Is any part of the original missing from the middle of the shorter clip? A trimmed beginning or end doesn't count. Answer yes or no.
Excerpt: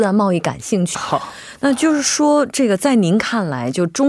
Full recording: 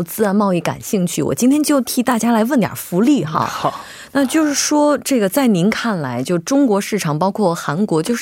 yes